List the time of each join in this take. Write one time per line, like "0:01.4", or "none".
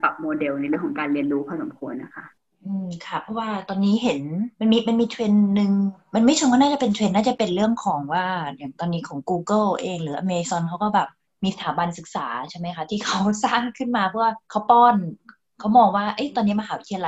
0:04.5
0:14.4

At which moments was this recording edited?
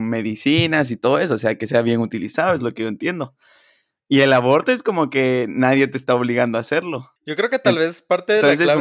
0:07.2

